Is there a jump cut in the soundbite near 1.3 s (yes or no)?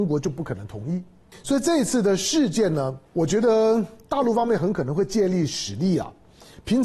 yes